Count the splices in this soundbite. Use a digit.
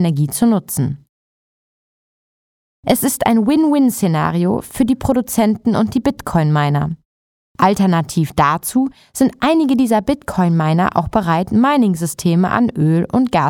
1